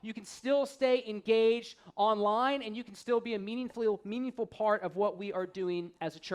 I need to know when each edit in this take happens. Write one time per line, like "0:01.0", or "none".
none